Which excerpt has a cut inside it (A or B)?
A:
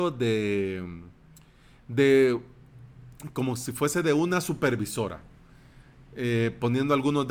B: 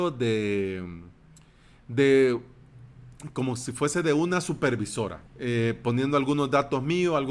B